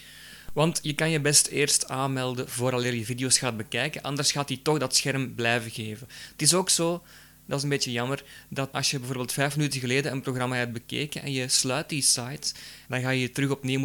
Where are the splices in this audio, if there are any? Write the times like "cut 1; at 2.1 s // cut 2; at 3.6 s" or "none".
cut 1; at 8.7 s // cut 2; at 12.9 s